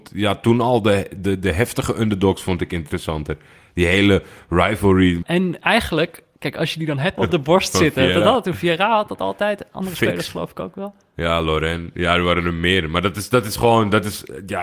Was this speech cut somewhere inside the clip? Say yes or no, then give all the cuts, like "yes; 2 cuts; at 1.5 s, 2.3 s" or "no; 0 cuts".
yes; 2 cuts; at 5.2 s, 7.2 s